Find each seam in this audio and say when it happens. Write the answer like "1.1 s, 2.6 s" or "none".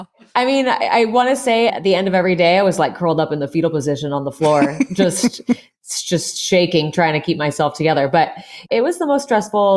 1.7 s